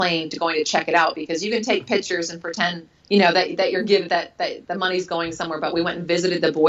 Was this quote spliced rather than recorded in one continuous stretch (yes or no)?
yes